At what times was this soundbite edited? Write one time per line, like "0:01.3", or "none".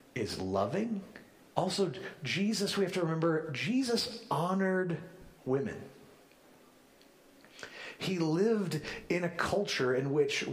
0:01.4
0:05.4